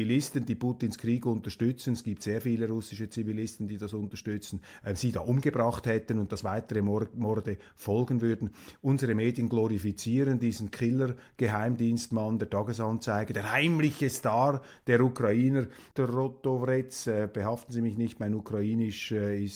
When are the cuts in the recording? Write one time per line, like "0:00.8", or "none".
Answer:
0:15.9